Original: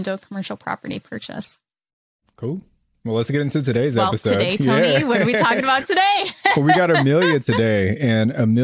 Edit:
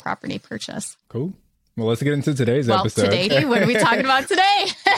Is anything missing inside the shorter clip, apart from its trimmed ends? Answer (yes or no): yes